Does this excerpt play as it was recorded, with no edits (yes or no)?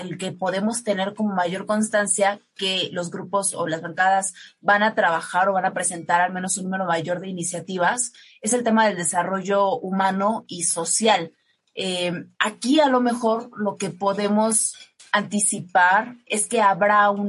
no